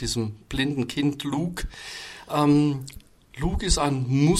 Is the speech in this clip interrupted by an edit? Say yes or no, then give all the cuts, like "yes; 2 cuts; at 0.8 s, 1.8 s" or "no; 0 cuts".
no; 0 cuts